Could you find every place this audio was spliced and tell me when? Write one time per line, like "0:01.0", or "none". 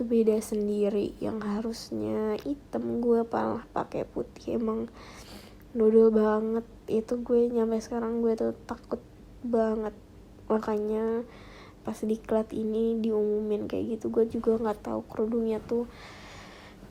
0:11.8